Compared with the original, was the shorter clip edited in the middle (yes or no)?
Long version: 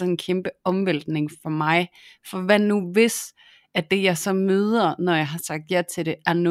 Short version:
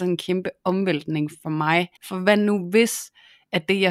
yes